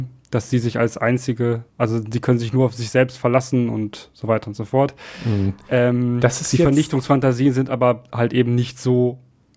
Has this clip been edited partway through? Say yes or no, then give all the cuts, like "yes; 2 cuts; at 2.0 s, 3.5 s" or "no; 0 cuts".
no; 0 cuts